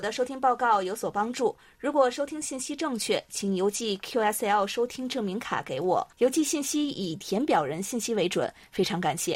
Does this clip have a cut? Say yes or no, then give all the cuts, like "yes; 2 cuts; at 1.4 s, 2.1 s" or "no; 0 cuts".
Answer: yes; 1 cut; at 6.1 s